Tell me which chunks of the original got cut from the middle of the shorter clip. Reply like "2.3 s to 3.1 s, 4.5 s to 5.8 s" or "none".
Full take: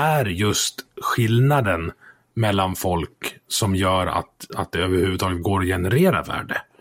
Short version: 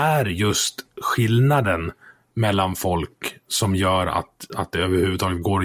none